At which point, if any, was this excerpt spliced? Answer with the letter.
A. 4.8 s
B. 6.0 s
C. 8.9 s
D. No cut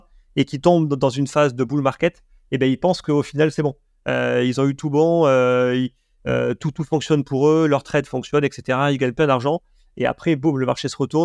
D